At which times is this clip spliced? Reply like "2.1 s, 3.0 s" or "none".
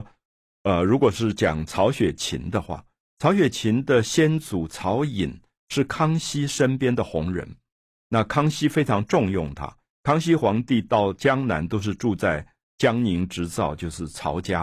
none